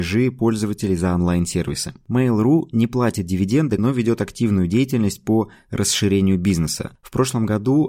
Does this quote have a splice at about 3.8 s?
yes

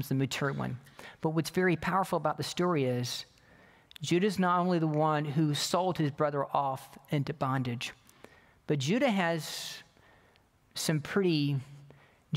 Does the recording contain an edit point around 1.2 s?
no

